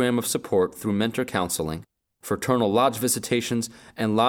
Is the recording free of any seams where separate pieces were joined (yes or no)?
yes